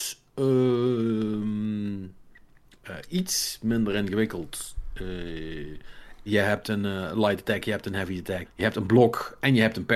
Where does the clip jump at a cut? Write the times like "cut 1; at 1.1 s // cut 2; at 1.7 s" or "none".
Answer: cut 1; at 6.3 s // cut 2; at 8.4 s